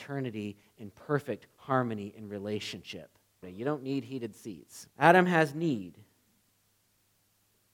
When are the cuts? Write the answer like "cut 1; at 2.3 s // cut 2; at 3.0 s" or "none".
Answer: cut 1; at 3.4 s // cut 2; at 4.9 s